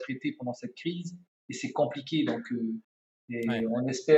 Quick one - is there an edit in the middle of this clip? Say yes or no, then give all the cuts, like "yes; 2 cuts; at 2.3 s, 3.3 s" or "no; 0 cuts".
no; 0 cuts